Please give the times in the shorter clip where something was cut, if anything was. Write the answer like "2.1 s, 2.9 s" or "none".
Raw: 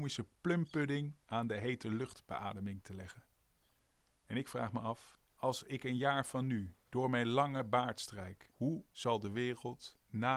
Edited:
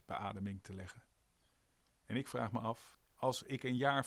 none